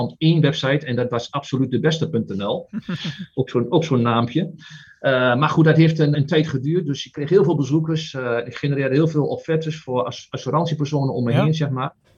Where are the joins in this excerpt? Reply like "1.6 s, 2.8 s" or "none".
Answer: 6.1 s